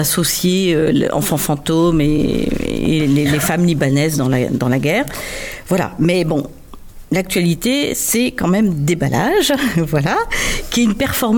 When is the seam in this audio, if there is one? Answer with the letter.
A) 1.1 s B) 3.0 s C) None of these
B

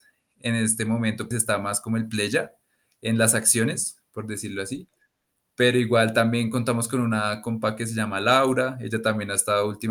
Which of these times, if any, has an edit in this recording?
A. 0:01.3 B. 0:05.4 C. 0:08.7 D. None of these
A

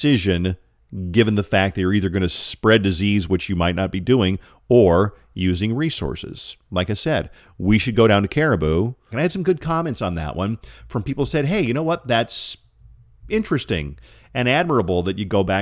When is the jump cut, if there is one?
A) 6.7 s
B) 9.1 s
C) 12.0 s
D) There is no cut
B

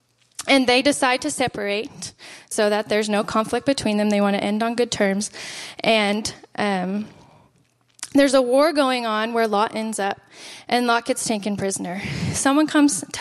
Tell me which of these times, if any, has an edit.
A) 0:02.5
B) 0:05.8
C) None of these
A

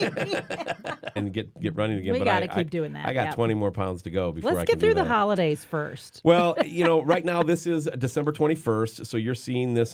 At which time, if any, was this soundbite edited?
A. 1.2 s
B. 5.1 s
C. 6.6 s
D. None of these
A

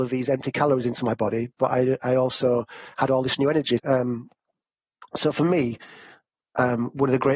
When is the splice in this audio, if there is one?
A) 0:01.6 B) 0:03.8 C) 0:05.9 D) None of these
B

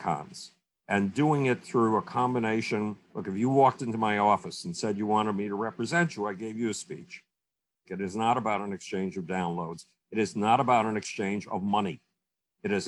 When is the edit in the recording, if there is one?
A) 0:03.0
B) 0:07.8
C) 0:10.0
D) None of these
B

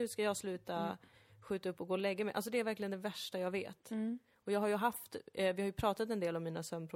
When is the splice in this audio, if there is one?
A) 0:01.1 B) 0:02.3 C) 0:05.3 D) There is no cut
D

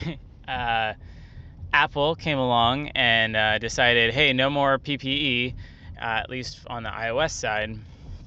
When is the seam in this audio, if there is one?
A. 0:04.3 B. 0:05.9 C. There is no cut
B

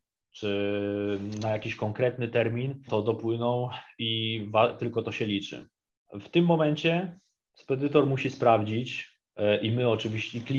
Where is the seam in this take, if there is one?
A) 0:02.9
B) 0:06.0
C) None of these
A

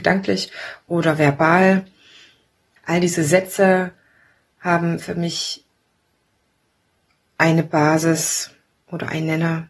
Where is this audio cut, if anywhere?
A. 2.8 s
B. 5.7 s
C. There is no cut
A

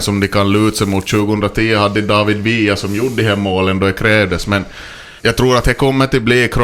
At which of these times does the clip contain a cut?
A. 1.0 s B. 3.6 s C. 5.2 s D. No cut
C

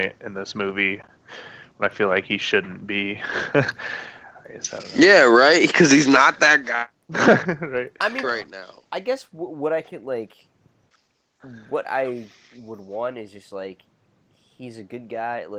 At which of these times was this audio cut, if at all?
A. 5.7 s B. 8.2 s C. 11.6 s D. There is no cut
B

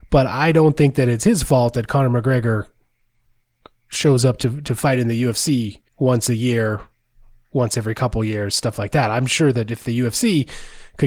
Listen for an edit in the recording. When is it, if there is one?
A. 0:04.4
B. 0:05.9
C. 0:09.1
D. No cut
B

